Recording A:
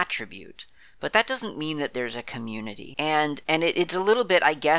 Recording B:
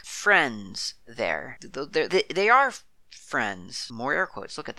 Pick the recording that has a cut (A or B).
B